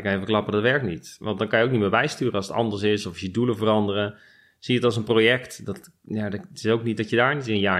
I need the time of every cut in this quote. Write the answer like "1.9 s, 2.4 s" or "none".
none